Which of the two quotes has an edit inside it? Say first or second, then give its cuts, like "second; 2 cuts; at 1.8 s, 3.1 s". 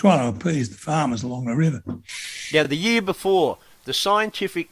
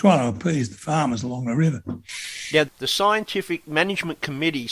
second; 1 cut; at 2.6 s